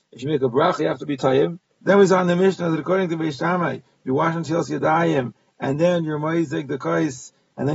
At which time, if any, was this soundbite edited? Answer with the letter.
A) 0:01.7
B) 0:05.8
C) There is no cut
A